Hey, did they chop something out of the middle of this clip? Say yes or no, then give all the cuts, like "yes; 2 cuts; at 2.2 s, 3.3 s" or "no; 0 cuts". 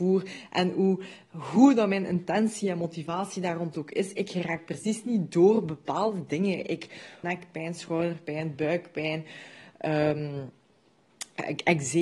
yes; 1 cut; at 7.2 s